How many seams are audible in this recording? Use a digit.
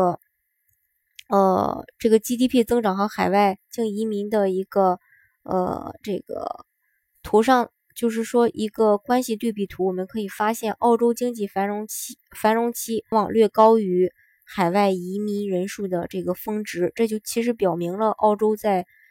1